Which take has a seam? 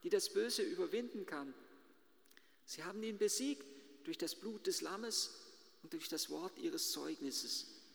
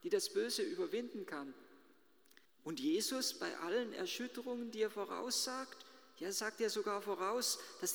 second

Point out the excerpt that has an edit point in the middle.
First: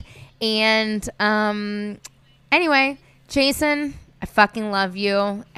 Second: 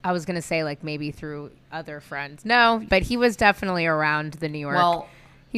second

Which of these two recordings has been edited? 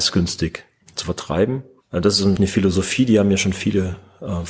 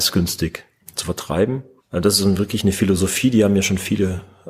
first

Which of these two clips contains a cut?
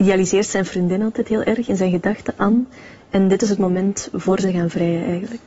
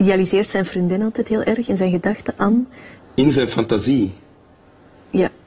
second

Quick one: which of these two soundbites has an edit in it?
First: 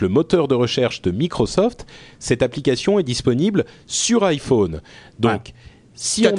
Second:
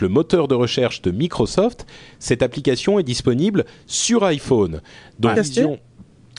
second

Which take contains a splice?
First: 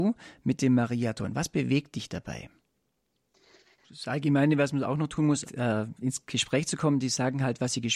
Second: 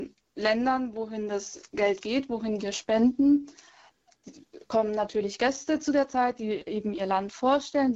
first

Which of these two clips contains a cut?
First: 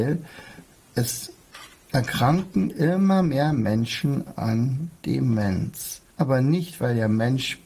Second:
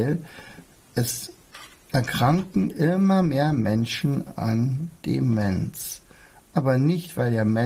first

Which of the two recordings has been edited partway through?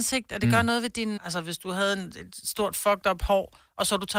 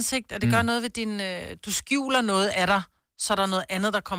first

